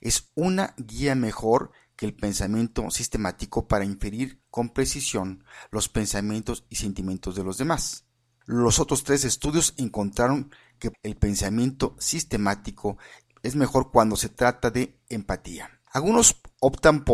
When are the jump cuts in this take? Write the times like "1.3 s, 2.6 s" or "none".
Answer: 10.9 s, 15.9 s